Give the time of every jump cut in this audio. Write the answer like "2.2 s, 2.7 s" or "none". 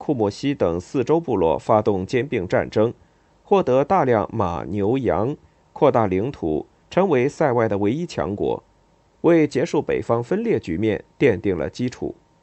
6.8 s, 9.1 s